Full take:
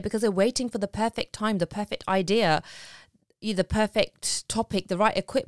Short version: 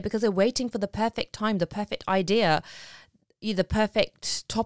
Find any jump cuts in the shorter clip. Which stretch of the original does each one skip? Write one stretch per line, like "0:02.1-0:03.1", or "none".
none